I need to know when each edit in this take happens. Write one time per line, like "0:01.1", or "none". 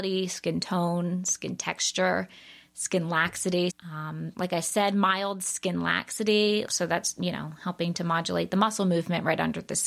0:03.7
0:06.7